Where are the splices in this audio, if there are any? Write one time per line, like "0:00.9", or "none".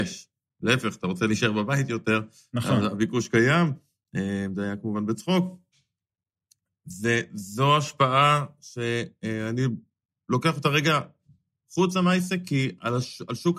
none